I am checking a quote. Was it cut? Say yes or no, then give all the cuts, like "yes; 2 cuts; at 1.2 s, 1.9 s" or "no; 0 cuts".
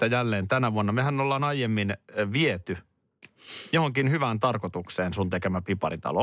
no; 0 cuts